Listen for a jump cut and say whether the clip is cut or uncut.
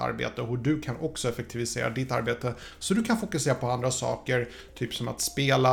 uncut